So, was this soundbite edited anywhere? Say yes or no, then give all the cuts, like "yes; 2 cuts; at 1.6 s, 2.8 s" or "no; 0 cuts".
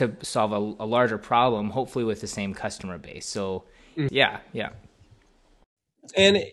yes; 1 cut; at 4.1 s